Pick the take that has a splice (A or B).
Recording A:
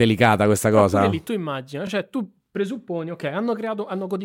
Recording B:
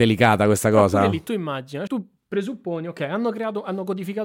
B